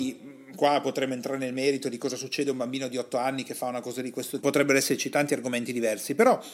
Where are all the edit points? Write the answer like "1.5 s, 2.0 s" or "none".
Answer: 4.4 s